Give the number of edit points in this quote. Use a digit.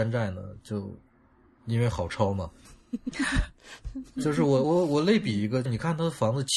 2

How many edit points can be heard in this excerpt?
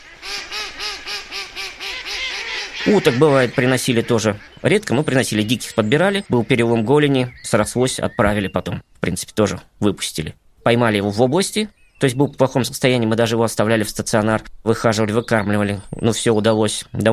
2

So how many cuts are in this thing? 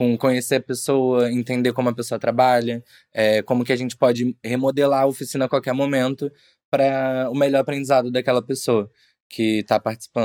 0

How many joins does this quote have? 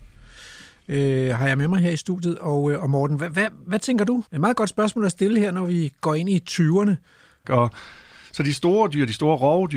2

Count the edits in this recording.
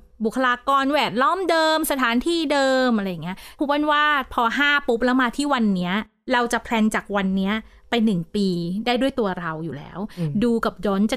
0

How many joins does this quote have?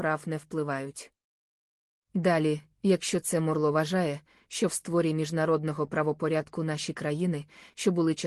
0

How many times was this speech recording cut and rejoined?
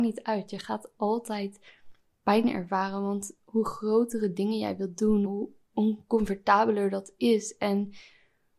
1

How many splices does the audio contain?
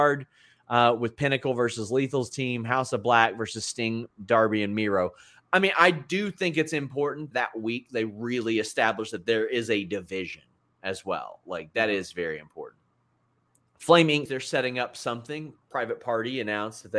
2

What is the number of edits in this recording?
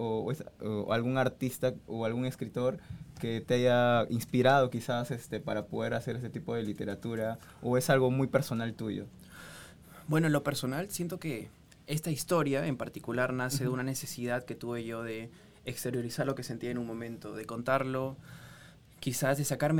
0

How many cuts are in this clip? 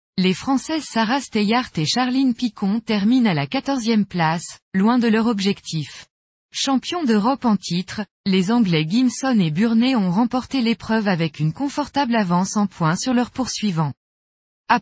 1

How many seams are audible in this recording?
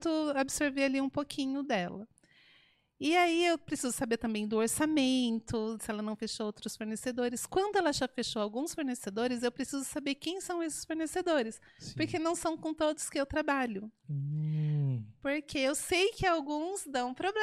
1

